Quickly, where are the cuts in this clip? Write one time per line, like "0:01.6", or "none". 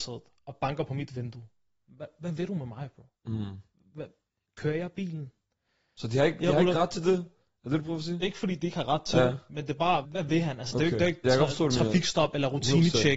0:10.0
0:11.2